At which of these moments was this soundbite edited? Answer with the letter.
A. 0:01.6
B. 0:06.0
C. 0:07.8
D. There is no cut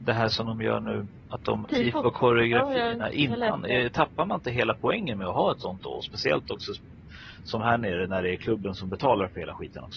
A